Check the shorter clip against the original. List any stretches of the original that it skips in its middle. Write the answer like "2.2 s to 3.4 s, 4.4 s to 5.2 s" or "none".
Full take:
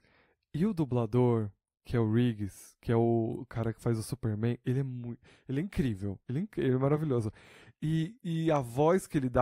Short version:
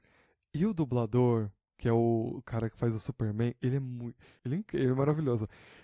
1.7 s to 2.8 s, 5.4 s to 6.2 s